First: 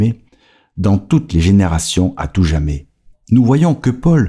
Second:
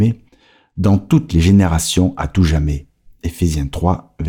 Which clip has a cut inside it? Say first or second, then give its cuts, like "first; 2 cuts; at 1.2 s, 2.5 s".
first; 1 cut; at 3.1 s